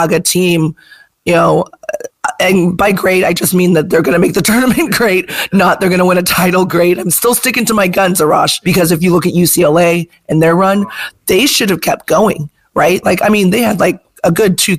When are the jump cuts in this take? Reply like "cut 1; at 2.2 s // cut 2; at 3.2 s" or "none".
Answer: cut 1; at 8.6 s // cut 2; at 13.0 s